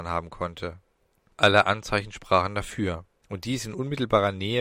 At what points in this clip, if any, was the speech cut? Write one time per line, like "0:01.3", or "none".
0:03.2

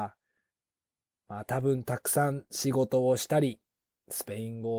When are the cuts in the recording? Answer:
0:01.2

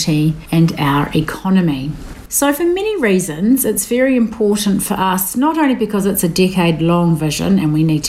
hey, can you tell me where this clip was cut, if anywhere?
0:02.3

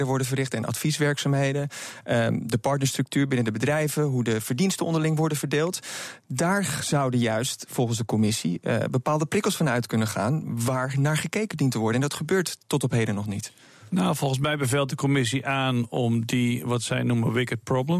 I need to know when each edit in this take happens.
none

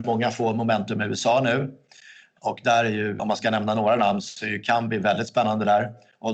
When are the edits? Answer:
0:03.2

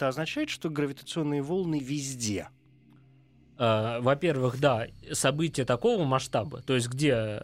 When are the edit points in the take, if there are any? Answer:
none

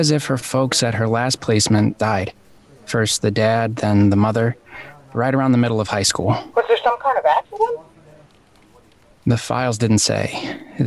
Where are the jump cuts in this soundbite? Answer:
0:02.0

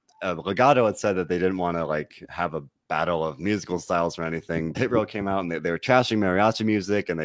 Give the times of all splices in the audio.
0:04.7

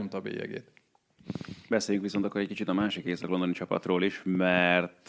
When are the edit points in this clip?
none

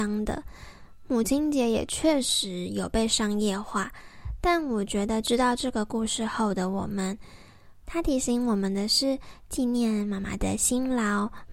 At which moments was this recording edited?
0:07.8
0:09.4

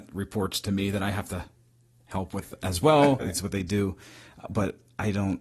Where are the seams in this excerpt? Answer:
0:03.2

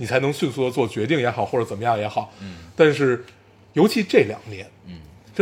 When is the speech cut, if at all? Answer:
none

